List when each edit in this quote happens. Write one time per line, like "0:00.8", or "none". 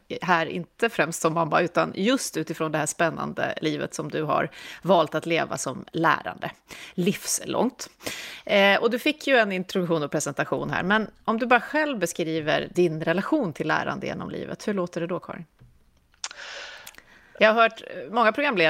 0:12.7
0:17.4

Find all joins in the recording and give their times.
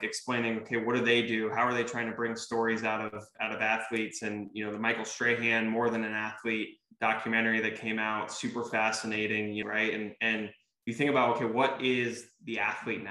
0:09.6

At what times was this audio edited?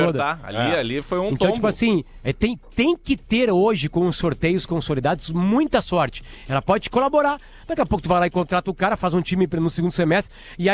none

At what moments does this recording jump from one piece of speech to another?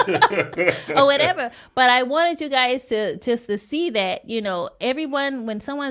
none

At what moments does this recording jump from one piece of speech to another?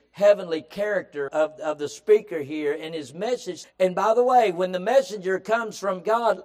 0:01.3
0:03.6

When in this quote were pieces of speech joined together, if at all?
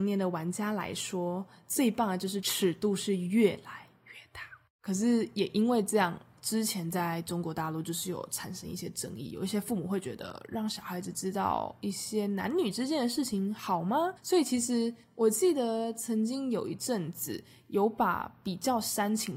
none

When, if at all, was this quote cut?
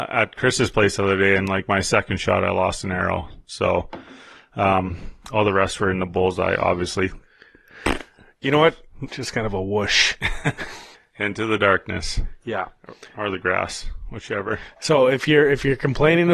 0:09.1

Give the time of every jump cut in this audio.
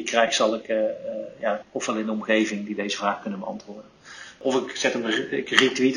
0:01.6

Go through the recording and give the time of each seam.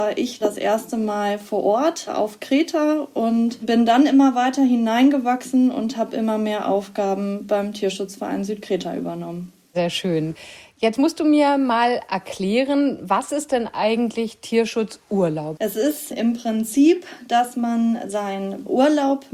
0:15.6

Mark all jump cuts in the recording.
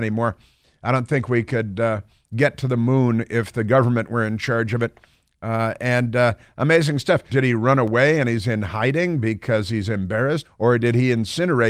0:07.3
0:10.4

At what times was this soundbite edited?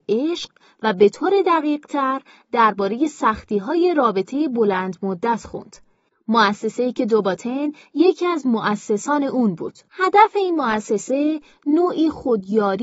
0:06.1
0:09.9

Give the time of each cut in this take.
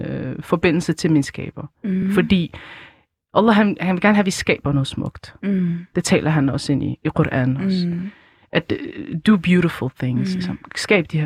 none

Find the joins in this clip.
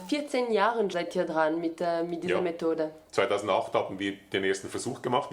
0:00.9

